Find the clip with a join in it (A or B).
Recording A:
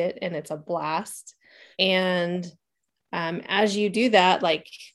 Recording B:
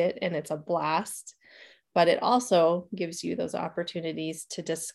A